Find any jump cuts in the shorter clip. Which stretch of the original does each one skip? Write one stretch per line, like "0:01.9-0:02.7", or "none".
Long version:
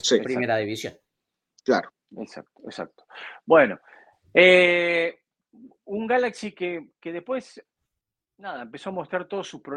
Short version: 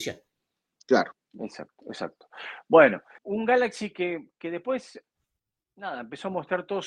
0:04.0-0:05.8